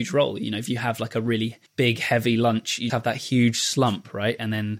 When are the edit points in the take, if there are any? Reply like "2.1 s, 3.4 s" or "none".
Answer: 1.7 s, 2.9 s